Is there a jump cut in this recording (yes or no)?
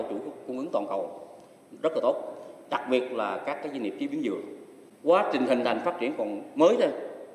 no